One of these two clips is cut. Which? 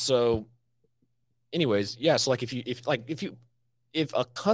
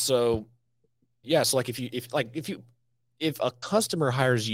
second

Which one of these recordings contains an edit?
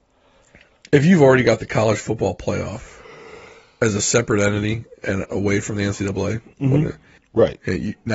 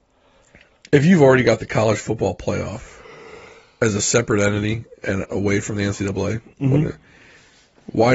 first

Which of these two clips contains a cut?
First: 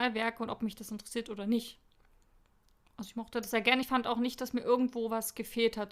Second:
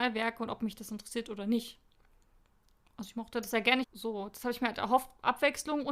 second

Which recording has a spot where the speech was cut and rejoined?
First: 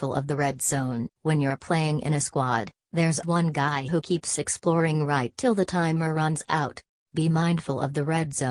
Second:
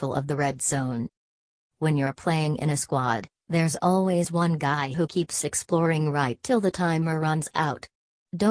first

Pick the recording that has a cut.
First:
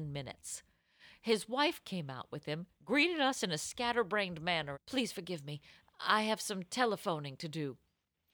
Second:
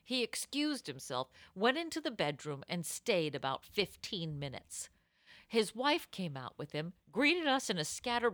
first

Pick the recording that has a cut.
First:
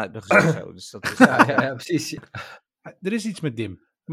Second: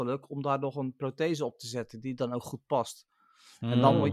first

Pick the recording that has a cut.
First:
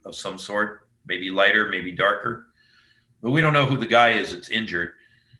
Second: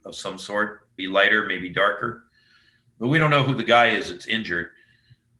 second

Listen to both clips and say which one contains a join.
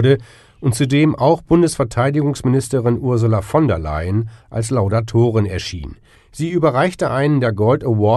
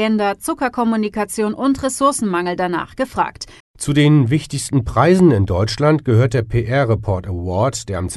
second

